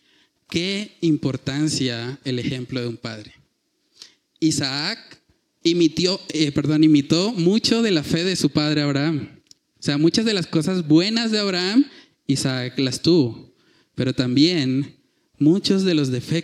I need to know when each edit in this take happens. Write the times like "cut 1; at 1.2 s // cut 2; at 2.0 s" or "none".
none